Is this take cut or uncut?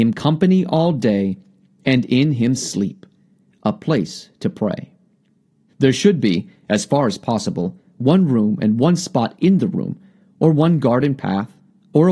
cut